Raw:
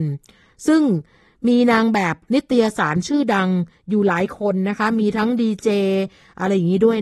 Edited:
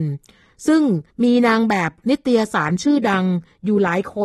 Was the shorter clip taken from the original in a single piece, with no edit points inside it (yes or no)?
no